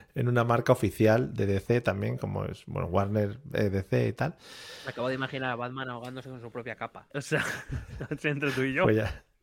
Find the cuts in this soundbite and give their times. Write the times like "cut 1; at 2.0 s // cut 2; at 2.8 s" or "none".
cut 1; at 7.1 s